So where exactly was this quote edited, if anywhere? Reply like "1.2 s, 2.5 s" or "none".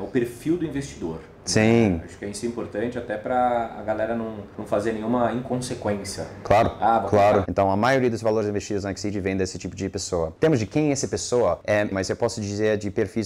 7.4 s, 11.9 s